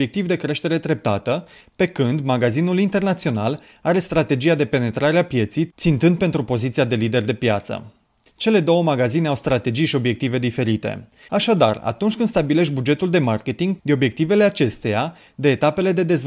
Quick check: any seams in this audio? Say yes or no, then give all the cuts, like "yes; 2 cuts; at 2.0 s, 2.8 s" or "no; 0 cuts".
yes; 3 cuts; at 8.3 s, 11.3 s, 13.8 s